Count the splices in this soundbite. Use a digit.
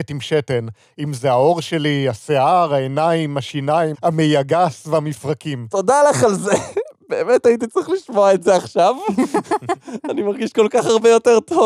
1